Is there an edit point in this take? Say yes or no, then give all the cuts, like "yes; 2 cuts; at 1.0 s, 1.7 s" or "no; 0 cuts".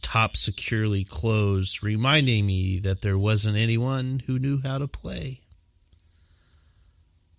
no; 0 cuts